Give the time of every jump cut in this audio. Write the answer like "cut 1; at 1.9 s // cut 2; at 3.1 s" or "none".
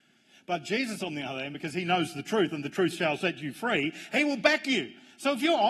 none